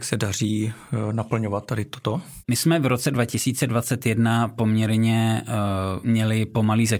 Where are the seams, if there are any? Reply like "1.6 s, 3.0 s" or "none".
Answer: 6.0 s